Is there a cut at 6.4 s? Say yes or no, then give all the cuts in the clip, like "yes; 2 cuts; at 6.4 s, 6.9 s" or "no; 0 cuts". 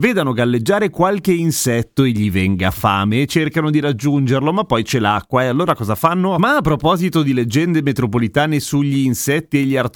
yes; 1 cut; at 6.4 s